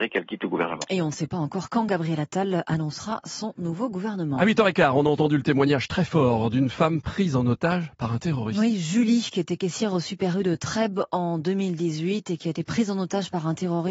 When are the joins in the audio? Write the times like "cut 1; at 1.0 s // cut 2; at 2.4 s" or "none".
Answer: none